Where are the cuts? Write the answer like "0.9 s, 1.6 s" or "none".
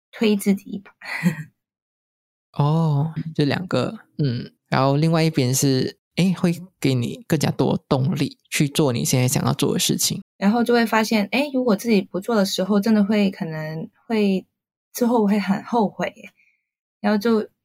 3.2 s, 4.6 s, 10.2 s